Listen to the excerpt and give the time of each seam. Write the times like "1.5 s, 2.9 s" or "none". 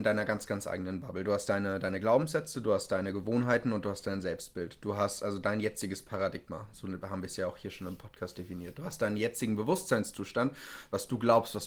none